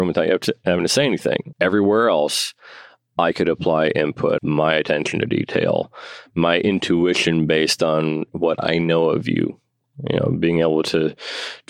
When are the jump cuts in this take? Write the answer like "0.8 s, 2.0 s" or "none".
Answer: 1.5 s, 4.4 s

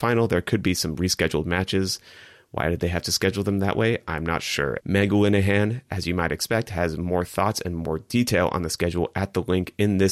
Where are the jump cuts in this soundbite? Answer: 4.8 s

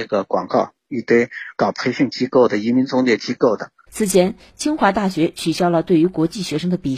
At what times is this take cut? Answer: 3.9 s

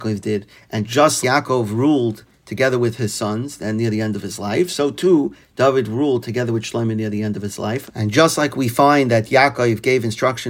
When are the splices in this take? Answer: 1.2 s, 7.9 s

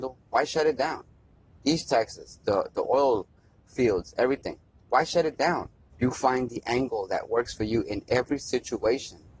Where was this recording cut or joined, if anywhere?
5.9 s

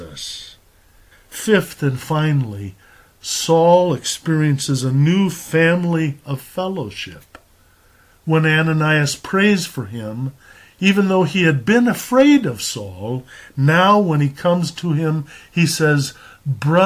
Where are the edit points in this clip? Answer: 1.1 s

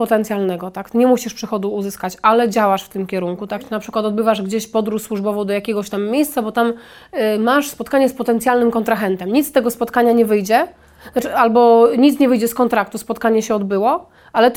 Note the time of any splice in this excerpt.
none

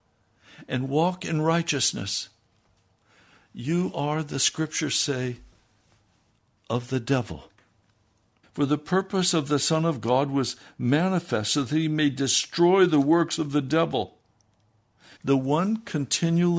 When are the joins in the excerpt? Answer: 8.4 s, 15.2 s

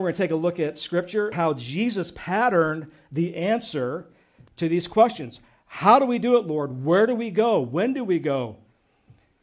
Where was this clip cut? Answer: 1.3 s

